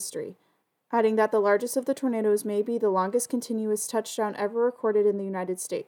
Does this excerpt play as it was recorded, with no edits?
yes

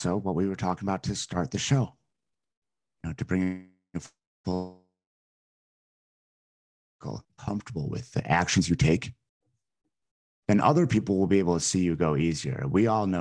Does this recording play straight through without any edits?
yes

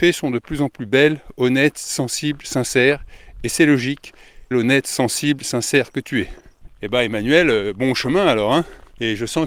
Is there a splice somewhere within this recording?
yes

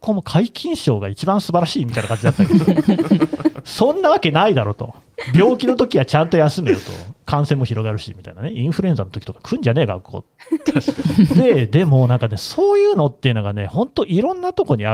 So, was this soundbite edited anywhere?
no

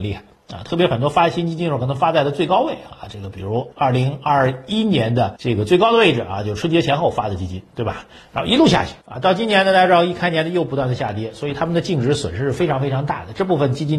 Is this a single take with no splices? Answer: yes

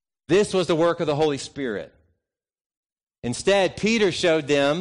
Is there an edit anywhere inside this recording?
yes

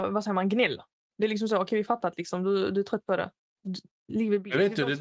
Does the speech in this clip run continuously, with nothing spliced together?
yes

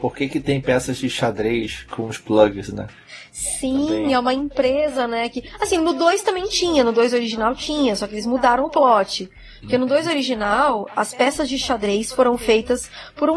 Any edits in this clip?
no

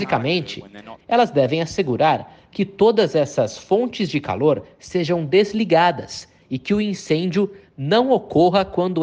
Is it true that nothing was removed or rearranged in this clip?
no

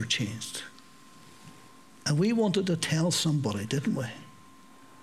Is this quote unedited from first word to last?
yes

